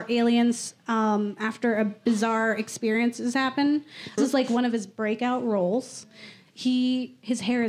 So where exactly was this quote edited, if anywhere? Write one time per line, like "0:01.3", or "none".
0:04.2